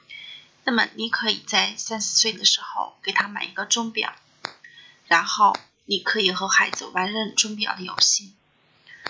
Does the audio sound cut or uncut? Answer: uncut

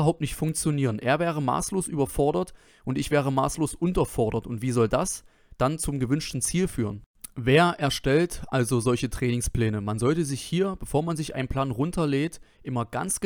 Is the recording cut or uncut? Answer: uncut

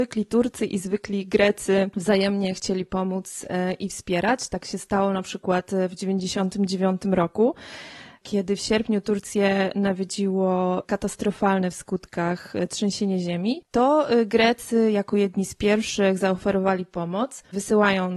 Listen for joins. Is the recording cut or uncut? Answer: uncut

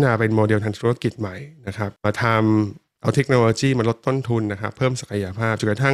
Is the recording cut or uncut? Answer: cut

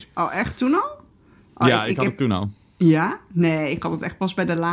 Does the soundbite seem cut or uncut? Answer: uncut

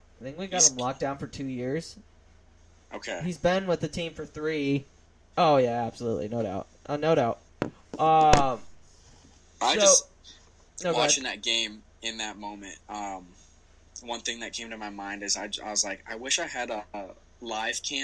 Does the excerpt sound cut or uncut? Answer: cut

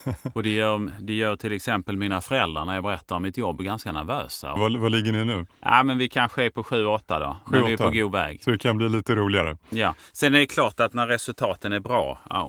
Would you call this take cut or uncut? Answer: cut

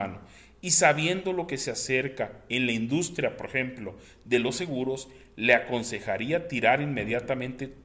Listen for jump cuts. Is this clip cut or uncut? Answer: uncut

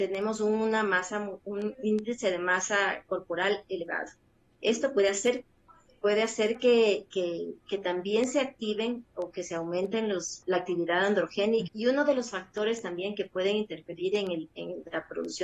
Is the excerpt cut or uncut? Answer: cut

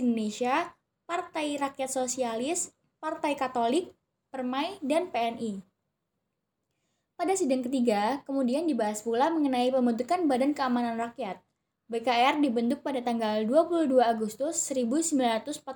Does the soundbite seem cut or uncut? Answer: uncut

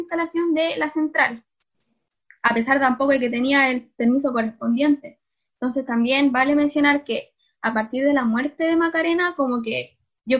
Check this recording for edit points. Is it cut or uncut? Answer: uncut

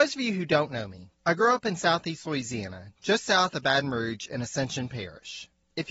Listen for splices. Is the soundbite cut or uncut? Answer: uncut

